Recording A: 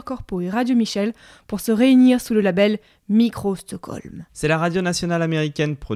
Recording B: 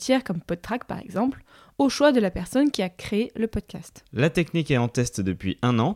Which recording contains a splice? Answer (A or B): A